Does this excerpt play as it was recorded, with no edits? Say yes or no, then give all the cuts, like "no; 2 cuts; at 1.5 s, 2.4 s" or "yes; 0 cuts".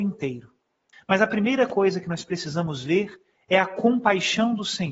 no; 1 cut; at 0.9 s